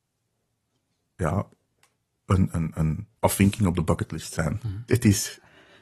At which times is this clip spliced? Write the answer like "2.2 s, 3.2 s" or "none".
3.2 s, 4.9 s